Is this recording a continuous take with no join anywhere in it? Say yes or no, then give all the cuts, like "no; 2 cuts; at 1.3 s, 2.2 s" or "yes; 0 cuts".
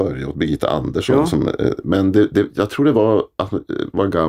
yes; 0 cuts